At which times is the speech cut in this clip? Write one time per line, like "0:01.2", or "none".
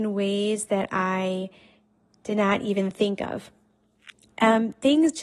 0:04.3